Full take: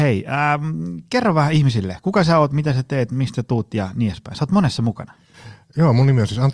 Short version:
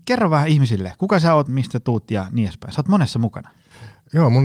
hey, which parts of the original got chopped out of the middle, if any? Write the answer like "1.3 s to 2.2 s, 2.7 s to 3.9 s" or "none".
2.5 s to 3.1 s